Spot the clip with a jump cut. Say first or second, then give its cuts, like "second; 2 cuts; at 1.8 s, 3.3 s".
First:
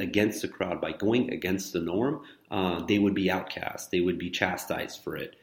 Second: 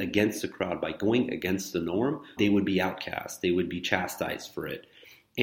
second; 1 cut; at 2.4 s